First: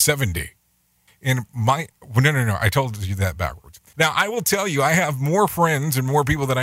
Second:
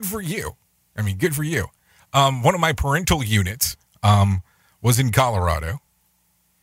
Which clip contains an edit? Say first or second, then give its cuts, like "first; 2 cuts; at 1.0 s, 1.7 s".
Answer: first; 2 cuts; at 1.1 s, 3.9 s